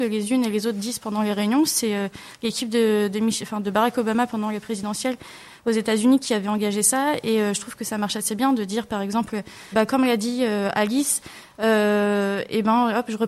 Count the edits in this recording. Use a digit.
1